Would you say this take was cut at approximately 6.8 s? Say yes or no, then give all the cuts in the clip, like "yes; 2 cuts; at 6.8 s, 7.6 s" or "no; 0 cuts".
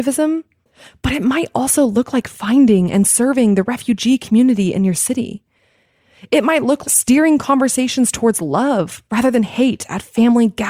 yes; 1 cut; at 6.8 s